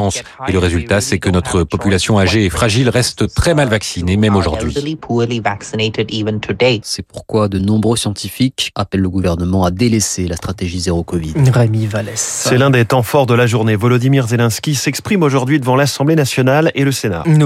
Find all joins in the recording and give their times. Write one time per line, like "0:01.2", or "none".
0:06.8